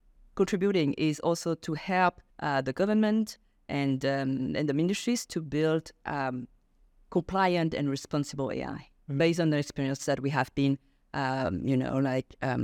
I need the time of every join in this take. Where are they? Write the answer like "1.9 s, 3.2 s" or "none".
2.3 s